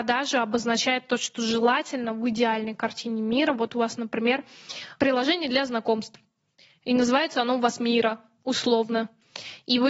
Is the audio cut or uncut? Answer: uncut